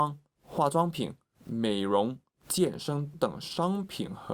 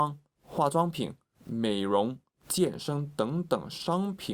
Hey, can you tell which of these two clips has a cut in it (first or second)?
first